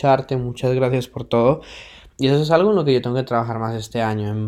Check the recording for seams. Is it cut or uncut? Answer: uncut